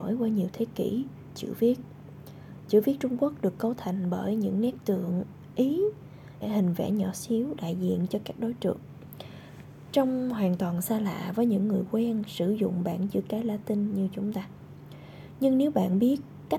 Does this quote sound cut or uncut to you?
cut